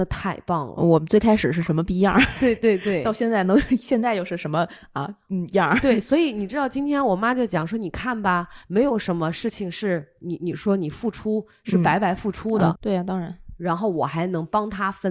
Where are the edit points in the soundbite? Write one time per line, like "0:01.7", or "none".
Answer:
0:12.8